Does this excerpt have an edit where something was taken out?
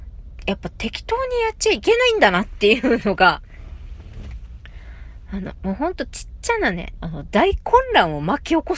yes; 2 cuts; at 5.5 s, 7.0 s

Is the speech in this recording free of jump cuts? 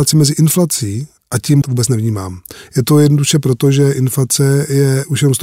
no; 1 cut; at 1.6 s

